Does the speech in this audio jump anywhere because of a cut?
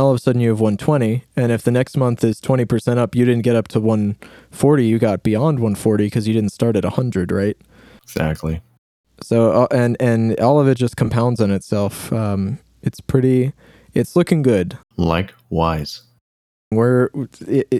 yes; 2 cuts; at 14.8 s, 16.7 s

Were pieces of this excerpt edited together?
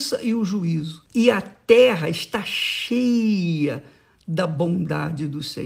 yes; 1 cut; at 1.1 s

